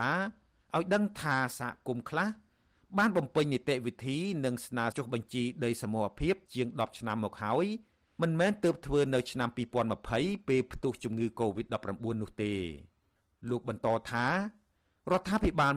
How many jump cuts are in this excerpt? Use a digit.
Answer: 0